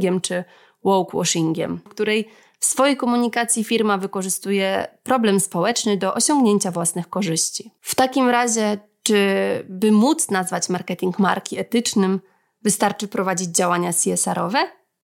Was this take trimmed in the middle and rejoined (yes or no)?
yes